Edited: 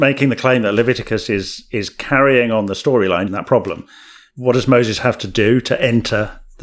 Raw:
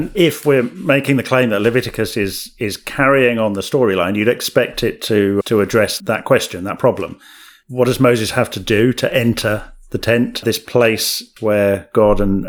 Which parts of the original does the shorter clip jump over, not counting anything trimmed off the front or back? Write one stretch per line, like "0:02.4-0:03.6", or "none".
0:04.1-0:06.6